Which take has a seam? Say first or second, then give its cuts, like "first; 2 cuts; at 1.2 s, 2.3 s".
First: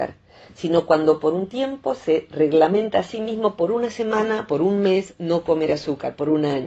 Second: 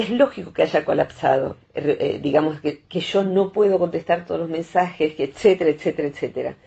second; 1 cut; at 1.6 s